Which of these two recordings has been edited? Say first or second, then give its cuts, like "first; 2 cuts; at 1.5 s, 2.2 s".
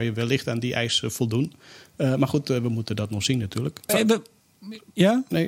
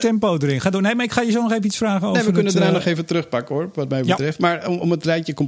first; 1 cut; at 3.9 s